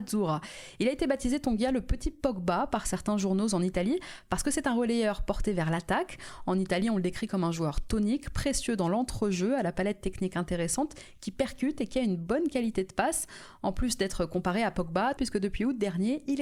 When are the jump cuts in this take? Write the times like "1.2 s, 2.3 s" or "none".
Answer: 15.2 s

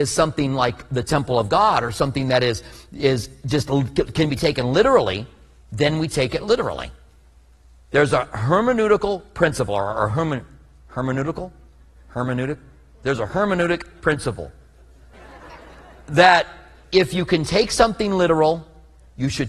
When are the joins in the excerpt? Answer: 15.1 s

